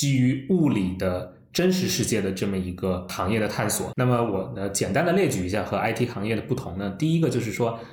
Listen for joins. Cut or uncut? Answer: uncut